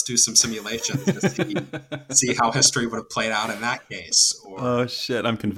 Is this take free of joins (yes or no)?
yes